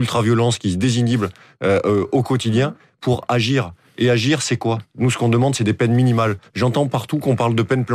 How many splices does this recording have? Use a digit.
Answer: 0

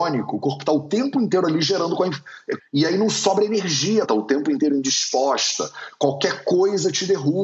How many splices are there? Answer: 2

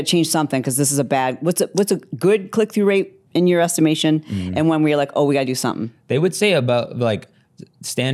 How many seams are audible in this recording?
1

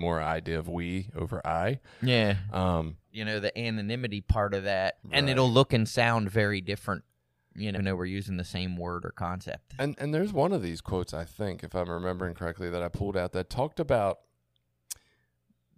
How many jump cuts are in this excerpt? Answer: 3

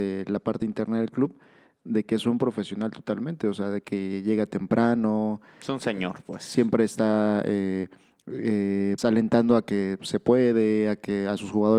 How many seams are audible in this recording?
1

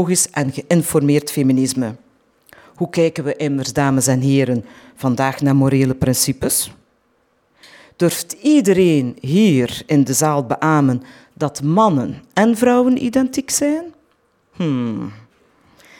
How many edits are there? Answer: 0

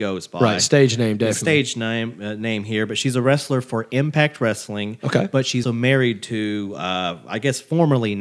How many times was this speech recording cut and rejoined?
1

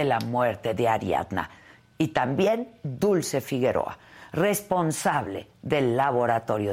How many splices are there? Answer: 0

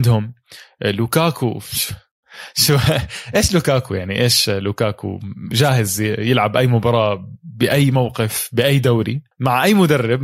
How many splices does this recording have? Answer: 1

